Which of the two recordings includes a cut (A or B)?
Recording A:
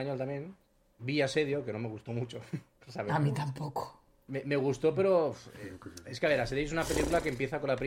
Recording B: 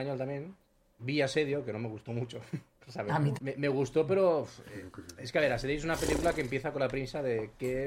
B